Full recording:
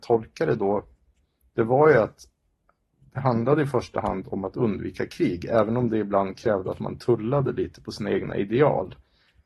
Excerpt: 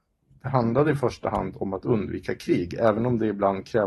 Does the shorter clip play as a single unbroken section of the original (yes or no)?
yes